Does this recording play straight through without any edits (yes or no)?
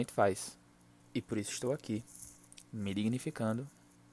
no